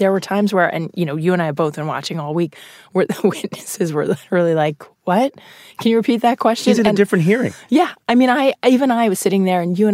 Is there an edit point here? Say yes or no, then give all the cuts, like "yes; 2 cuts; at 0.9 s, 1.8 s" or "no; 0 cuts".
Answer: no; 0 cuts